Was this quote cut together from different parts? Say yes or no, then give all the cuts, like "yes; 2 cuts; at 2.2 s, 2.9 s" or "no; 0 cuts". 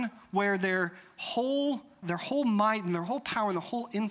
yes; 1 cut; at 2.0 s